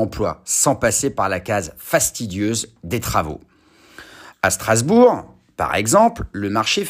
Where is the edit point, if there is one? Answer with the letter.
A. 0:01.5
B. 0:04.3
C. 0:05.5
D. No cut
B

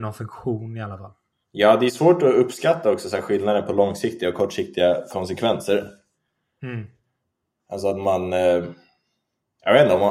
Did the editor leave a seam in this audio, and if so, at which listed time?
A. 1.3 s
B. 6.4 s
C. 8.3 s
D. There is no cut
A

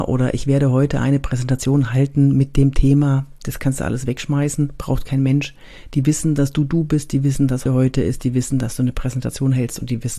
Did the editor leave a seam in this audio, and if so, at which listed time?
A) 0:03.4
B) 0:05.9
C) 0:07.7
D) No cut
C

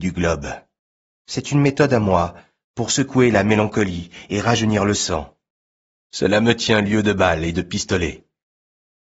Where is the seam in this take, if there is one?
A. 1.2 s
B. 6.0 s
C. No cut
B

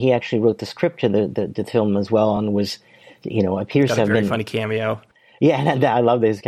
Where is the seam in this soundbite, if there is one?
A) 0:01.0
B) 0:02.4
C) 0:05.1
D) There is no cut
D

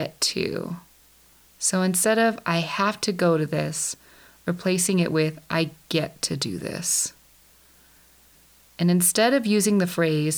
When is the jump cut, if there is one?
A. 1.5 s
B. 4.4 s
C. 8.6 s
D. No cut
C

